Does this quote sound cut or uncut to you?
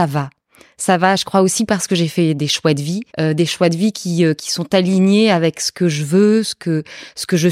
cut